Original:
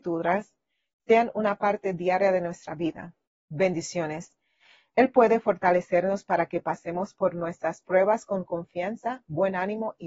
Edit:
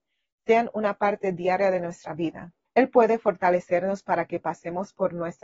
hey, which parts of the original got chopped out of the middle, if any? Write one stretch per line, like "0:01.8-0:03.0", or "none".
0:03.3-0:04.9

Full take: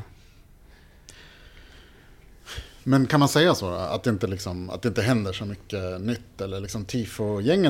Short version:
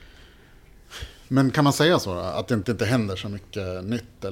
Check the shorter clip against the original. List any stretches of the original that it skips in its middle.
0:04.2-0:04.8

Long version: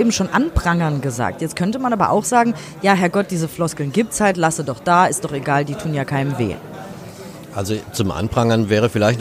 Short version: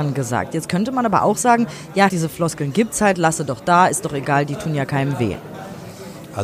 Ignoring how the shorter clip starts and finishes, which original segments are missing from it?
0:02.9-0:03.3

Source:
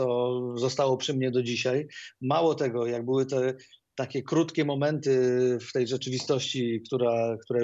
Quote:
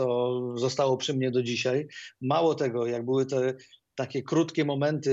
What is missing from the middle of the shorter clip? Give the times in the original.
none

